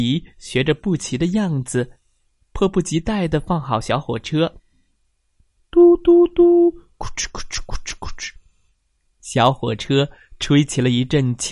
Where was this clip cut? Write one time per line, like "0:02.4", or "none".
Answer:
0:05.6

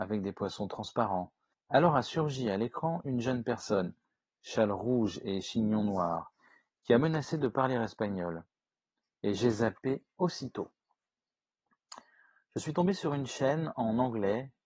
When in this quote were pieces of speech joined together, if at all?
0:01.5

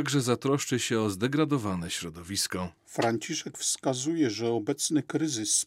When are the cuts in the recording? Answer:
none

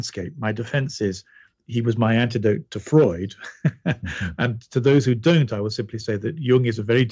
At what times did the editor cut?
none

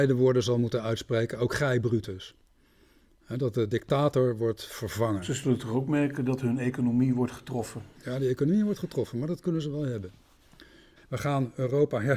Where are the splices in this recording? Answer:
0:11.0

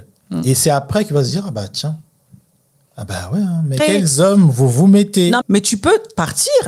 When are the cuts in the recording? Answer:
0:03.8
0:05.4

